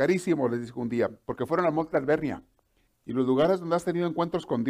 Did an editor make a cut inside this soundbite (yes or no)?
yes